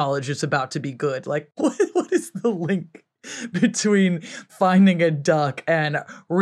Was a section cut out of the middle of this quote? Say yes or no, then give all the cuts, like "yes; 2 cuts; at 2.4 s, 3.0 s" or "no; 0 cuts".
no; 0 cuts